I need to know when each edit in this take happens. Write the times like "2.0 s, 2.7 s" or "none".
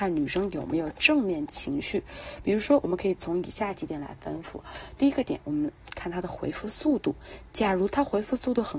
none